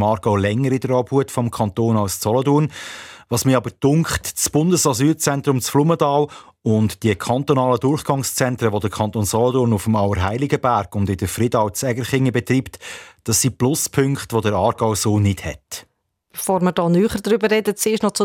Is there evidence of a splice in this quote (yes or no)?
no